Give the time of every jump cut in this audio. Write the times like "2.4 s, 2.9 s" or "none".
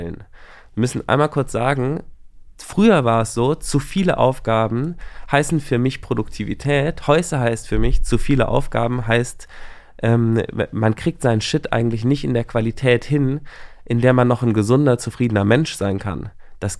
none